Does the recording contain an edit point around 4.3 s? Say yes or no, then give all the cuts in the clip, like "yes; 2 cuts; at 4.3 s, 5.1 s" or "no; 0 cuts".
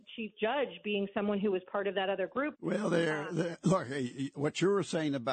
no; 1 cut; at 2.5 s